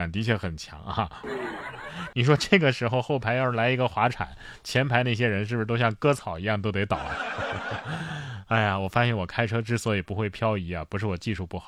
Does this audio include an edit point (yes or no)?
yes